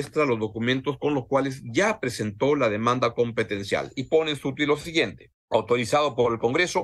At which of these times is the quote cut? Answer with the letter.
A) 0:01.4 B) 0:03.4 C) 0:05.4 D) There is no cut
C